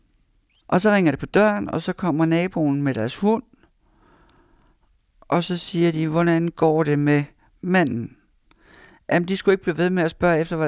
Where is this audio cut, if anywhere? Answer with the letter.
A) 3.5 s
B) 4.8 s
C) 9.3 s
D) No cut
D